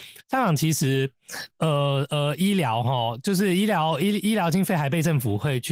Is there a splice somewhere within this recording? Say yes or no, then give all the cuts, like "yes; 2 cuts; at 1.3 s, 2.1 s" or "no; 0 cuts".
no; 0 cuts